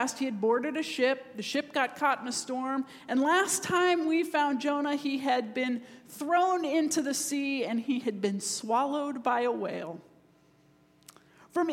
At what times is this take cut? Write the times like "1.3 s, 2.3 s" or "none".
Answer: none